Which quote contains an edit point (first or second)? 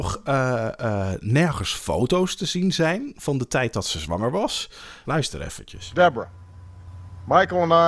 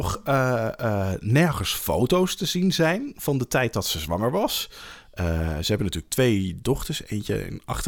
first